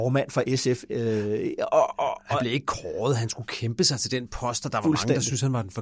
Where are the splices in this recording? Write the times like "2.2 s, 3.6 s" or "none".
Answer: none